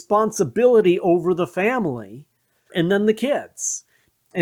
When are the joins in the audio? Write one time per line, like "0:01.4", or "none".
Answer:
0:02.7